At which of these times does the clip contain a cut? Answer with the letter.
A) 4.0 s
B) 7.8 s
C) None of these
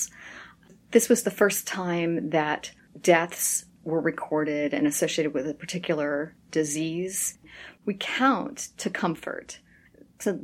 B